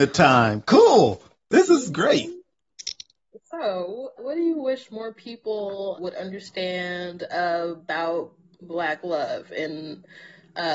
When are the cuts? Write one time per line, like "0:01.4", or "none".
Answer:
0:04.2
0:06.0